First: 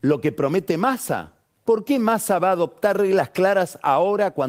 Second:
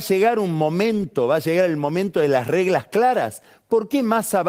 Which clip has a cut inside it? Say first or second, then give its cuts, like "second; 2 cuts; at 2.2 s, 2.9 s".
first; 1 cut; at 1.6 s